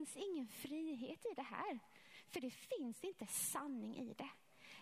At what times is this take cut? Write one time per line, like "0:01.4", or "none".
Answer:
none